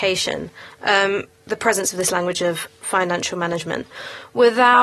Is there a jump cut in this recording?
yes; 1 cut; at 1.5 s

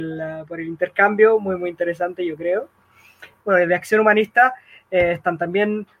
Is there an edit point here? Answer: yes; 1 cut; at 3.4 s

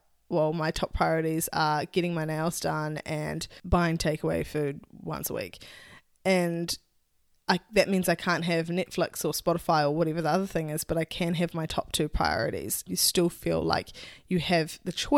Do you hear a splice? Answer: yes; 1 cut; at 12.9 s

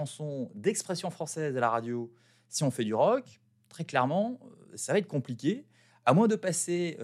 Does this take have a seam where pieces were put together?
no; 0 cuts

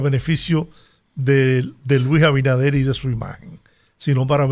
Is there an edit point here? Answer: no; 0 cuts

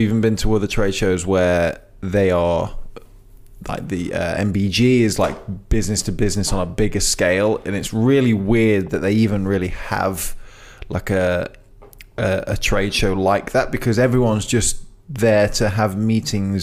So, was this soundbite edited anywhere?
no; 0 cuts

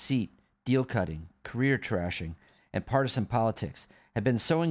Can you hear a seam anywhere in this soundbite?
no; 0 cuts

